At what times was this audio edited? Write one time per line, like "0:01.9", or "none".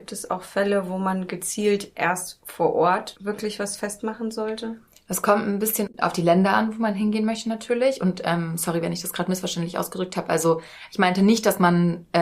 none